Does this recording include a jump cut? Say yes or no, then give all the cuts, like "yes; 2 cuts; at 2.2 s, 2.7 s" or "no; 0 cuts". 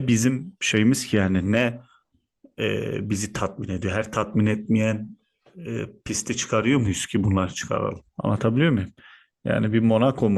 yes; 1 cut; at 8.1 s